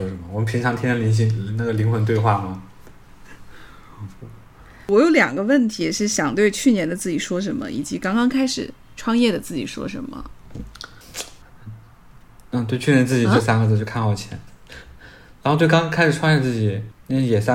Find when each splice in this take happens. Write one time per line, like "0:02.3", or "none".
0:11.4